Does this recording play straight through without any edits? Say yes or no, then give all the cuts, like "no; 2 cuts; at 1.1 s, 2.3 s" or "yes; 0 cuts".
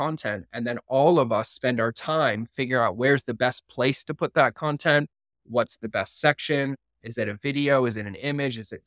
yes; 0 cuts